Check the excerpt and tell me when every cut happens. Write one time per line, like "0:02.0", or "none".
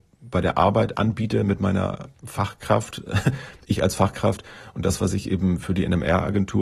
0:02.1